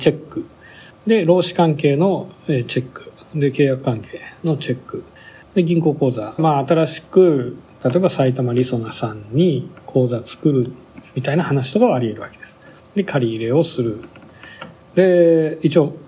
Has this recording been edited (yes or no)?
yes